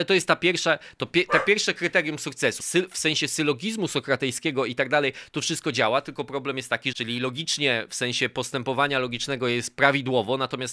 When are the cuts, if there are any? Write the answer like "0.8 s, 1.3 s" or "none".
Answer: 2.6 s, 6.9 s